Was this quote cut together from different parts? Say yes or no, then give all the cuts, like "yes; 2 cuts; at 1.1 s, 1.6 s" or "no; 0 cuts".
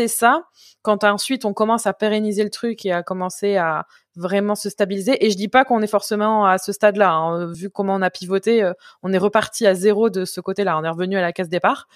no; 0 cuts